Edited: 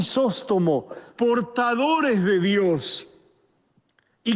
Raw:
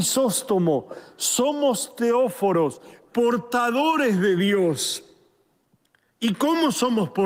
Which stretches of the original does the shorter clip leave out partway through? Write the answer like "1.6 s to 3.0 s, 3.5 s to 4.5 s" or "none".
1.1 s to 3.1 s